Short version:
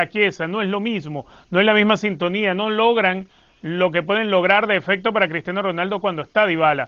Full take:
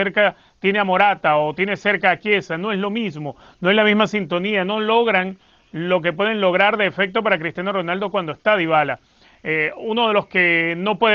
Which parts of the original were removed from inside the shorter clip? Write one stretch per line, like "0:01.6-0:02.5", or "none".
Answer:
none